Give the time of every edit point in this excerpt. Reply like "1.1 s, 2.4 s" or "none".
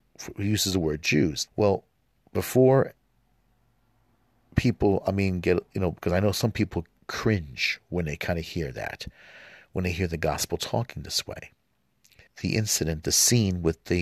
1.5 s, 12.3 s